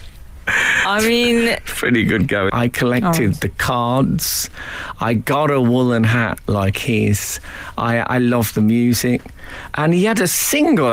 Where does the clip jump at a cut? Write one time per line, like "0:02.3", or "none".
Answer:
0:02.5